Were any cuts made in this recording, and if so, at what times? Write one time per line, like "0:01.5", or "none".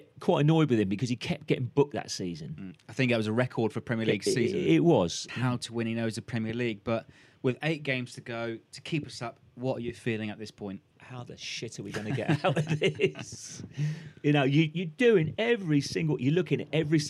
0:05.3
0:10.9